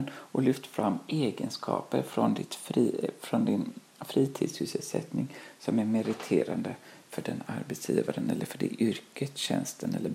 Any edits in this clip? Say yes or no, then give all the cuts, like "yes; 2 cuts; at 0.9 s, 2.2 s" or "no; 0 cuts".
no; 0 cuts